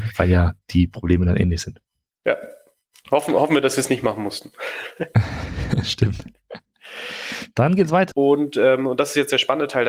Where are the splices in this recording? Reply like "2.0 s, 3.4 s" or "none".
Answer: 8.1 s